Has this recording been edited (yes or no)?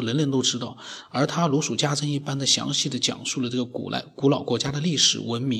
no